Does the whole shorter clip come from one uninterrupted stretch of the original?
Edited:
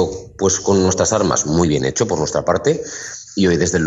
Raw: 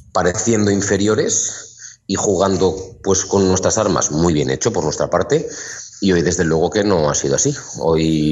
yes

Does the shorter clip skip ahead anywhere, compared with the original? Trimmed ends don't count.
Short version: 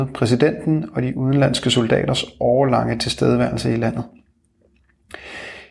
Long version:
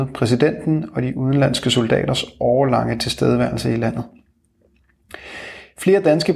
no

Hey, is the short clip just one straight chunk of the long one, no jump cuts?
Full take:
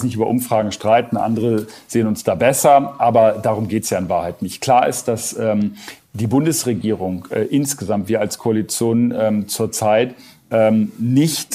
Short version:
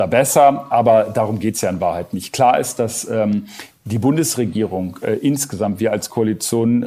yes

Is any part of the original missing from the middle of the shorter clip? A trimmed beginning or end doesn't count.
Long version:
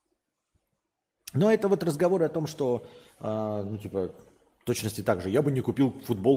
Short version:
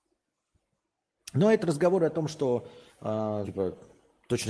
yes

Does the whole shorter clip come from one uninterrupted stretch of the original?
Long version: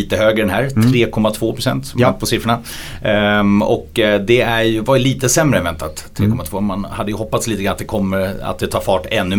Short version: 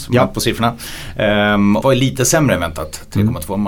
no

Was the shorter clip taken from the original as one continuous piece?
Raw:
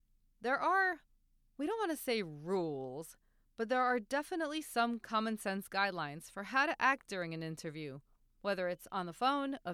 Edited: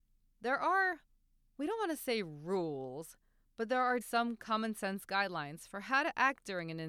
no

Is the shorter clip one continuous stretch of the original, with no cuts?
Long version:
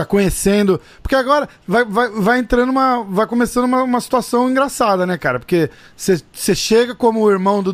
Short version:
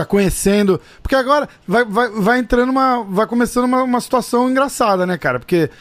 yes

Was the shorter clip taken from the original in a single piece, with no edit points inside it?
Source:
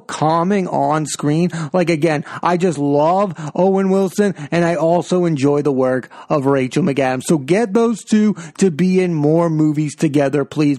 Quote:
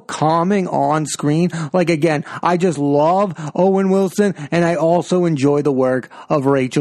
yes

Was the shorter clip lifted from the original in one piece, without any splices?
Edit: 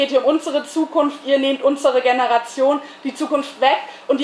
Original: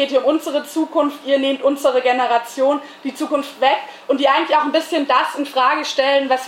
yes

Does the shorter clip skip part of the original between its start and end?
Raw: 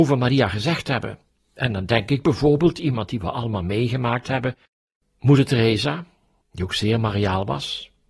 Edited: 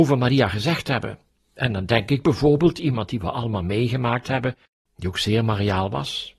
yes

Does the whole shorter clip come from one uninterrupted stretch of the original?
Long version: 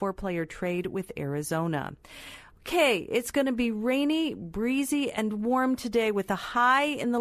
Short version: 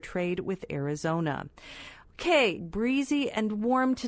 no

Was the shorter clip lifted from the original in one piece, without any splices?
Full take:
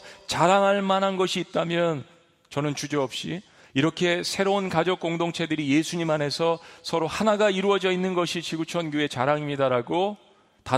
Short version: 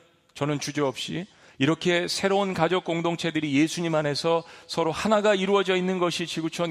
yes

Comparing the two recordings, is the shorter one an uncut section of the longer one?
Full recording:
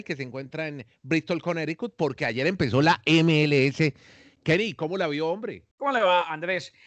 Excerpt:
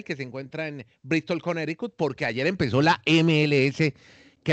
yes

